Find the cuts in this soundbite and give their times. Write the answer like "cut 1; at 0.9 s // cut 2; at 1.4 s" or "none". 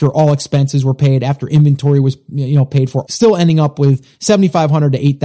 cut 1; at 3.1 s